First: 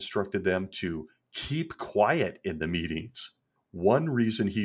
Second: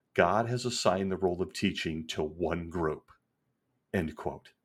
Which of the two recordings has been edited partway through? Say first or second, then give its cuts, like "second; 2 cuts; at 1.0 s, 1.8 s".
first; 1 cut; at 3.6 s